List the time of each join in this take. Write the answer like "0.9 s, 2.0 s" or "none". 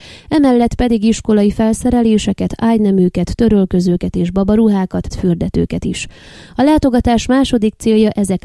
5.1 s